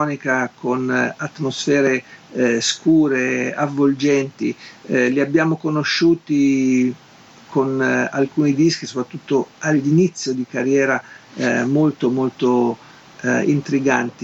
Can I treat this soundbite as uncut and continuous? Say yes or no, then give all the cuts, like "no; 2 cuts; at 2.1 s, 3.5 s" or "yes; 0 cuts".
yes; 0 cuts